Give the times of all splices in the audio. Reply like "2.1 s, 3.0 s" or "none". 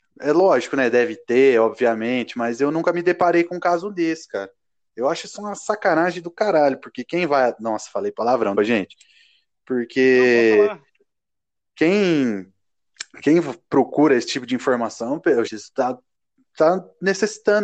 8.6 s, 15.5 s